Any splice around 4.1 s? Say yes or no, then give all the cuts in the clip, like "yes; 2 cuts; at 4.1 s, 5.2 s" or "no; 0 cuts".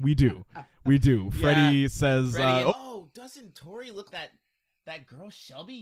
yes; 2 cuts; at 2.7 s, 4.1 s